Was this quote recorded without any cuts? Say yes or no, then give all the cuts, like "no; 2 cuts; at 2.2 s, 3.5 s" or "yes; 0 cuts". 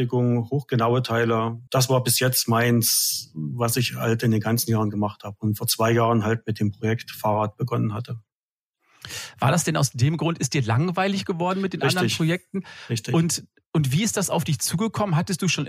no; 1 cut; at 1.7 s